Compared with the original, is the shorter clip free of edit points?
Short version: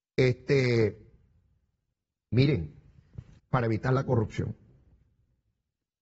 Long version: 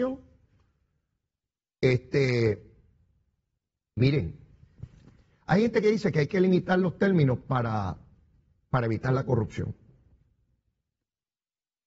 no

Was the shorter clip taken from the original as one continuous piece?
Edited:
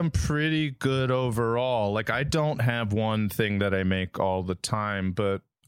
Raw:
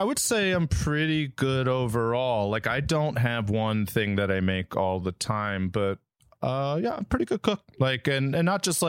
yes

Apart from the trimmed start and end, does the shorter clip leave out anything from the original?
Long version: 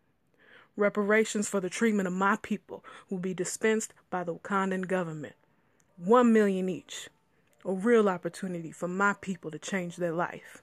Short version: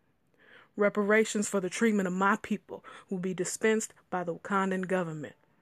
no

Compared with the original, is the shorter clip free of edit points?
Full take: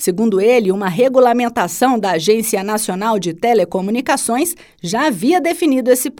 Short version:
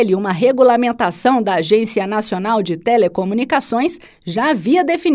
yes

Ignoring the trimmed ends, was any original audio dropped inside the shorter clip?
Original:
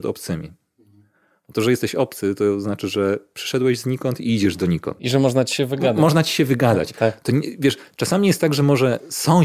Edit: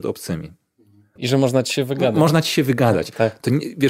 yes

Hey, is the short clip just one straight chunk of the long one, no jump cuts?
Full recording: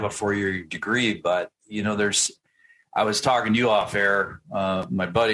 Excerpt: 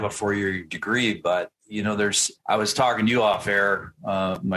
no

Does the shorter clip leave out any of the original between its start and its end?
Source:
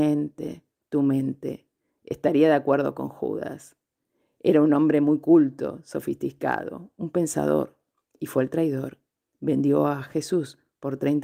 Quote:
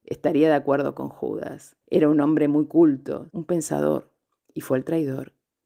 yes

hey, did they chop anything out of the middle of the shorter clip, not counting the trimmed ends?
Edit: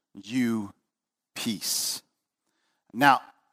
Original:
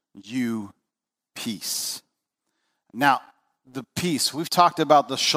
no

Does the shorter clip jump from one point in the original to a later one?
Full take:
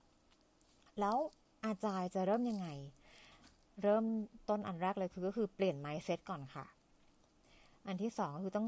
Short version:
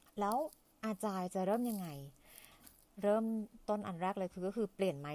no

